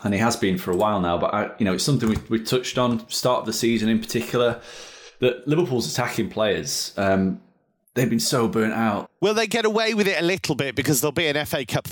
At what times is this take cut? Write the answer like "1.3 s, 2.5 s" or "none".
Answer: 9.1 s